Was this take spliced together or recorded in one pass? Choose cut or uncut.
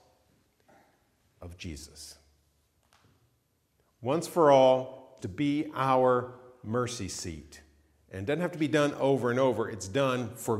cut